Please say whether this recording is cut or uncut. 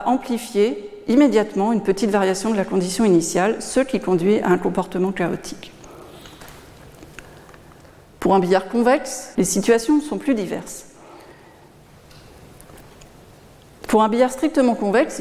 cut